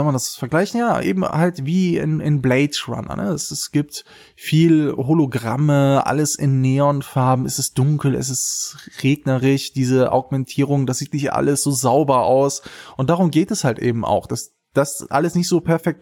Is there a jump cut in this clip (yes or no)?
no